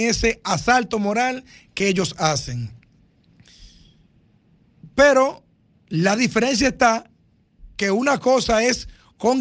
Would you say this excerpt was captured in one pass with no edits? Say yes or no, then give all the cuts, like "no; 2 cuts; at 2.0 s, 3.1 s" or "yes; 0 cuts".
yes; 0 cuts